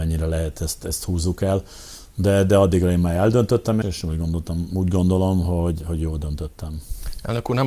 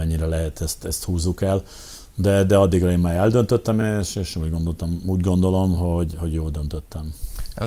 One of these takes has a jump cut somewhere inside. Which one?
first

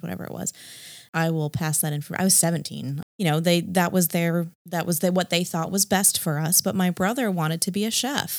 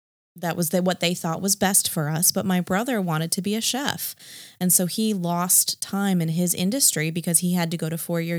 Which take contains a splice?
first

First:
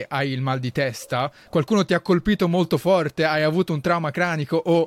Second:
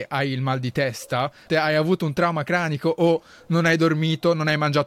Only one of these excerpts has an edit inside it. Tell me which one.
second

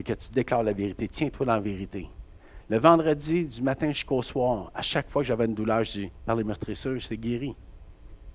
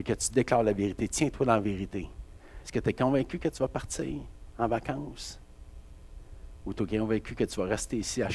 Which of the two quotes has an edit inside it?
second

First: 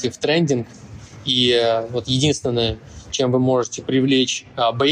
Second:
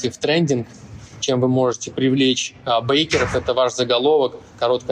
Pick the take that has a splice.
second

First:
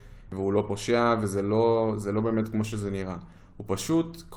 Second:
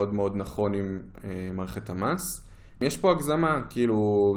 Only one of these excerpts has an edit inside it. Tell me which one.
second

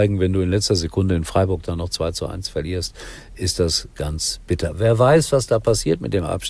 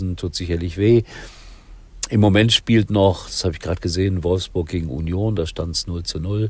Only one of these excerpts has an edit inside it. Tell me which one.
first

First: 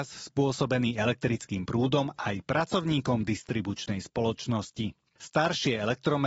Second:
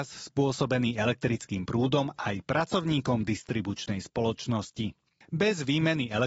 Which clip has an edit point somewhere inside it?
first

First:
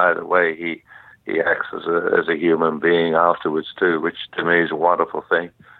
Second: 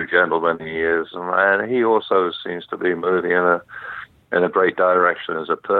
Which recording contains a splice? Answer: second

